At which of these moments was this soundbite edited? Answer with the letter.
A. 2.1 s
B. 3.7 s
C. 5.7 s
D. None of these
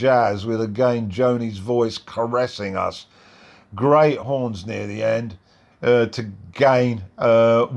C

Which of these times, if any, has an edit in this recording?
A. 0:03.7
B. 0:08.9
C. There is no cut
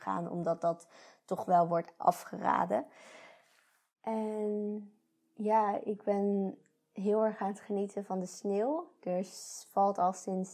C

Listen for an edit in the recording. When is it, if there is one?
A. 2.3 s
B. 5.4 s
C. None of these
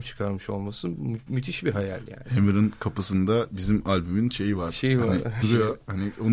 B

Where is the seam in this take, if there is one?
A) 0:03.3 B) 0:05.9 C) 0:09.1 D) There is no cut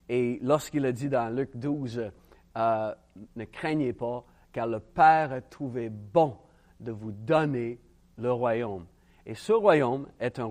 A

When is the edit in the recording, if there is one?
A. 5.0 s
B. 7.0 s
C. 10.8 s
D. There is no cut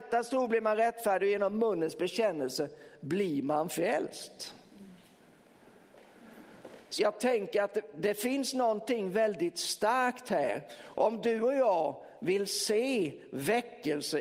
B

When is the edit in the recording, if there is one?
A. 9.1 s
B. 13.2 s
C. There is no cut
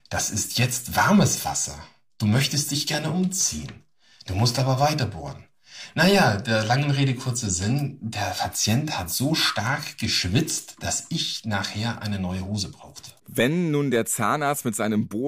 B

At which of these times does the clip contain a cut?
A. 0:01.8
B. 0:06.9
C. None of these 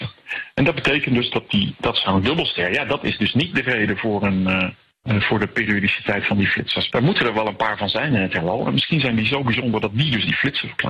B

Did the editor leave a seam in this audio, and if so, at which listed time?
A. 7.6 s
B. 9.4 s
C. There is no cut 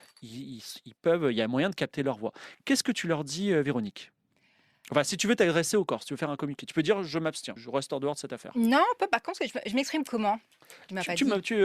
A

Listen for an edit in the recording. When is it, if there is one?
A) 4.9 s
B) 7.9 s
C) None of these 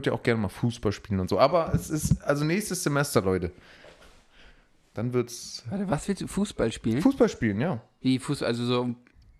A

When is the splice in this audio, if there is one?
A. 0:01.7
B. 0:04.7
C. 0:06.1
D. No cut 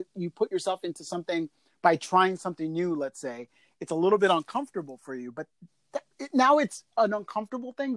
C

